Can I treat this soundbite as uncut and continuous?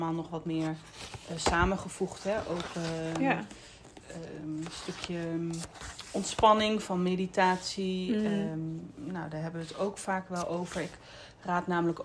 yes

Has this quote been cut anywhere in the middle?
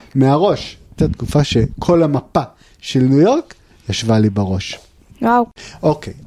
no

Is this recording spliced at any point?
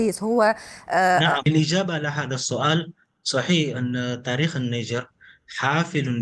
yes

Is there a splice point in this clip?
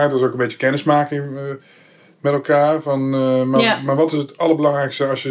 no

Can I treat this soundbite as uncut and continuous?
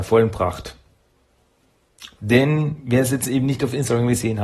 no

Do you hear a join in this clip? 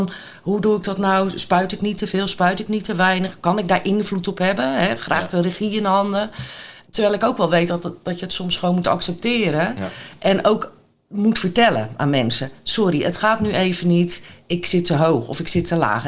no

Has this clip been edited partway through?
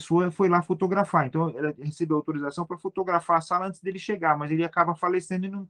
no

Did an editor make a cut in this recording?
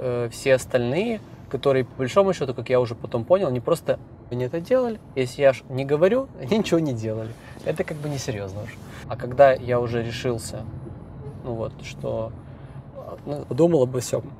yes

